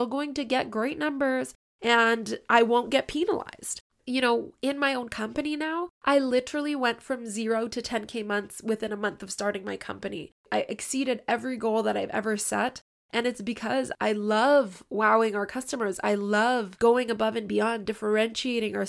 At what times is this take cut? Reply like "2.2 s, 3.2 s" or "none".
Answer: 3.9 s